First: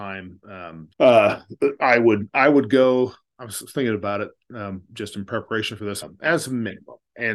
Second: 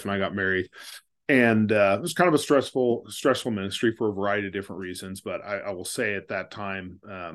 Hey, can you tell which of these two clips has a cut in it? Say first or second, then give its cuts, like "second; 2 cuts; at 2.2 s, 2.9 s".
first; 2 cuts; at 0.9 s, 6.0 s